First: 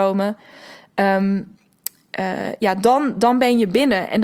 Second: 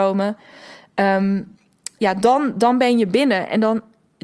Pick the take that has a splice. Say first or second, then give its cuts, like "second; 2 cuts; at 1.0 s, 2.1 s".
second; 1 cut; at 2.0 s